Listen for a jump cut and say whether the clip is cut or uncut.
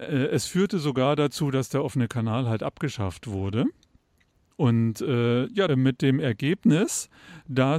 cut